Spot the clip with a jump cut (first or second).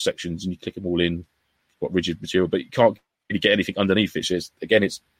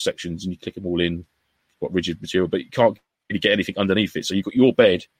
first